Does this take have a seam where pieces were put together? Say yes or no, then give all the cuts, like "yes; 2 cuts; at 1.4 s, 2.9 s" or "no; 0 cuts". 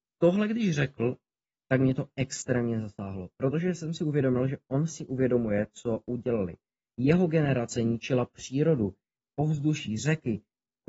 no; 0 cuts